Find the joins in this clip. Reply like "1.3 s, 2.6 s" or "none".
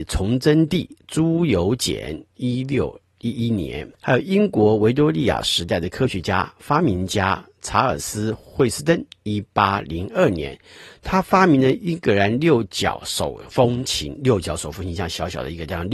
3.9 s

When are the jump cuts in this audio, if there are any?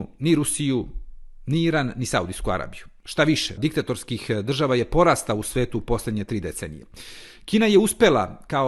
3.6 s

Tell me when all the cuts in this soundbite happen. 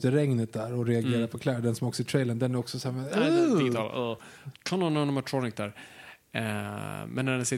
4.5 s

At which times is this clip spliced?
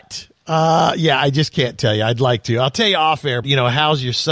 3.4 s

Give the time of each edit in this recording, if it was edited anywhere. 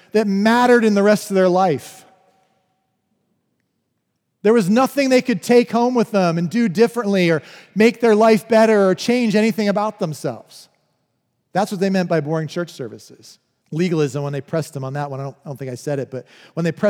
13.6 s

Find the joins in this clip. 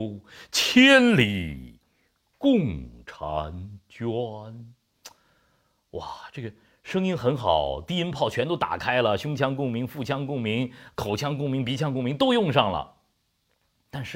none

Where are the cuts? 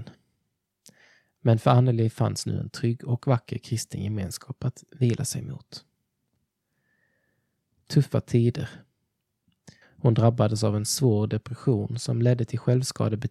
9.8 s

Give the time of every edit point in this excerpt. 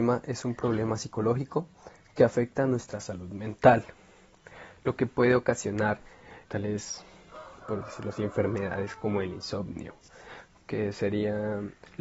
6.4 s

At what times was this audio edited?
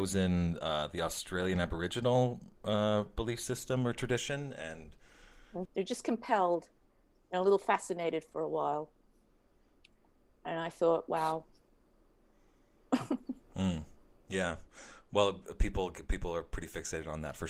5.7 s

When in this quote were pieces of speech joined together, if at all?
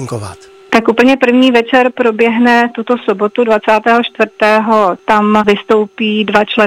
5.0 s

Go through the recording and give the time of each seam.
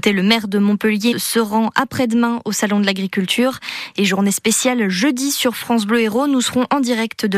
1.1 s

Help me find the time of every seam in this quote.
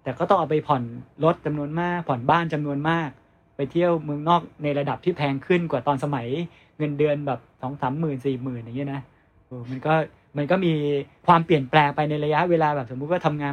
9.5 s

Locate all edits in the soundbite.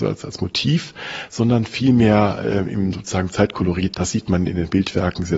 3.9 s

